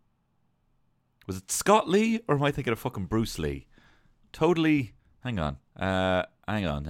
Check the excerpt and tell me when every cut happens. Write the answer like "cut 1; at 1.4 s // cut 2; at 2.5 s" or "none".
cut 1; at 5.7 s